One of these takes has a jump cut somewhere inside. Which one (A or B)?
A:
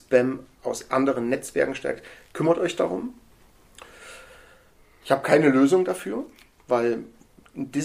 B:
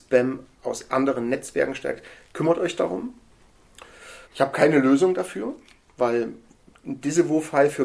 B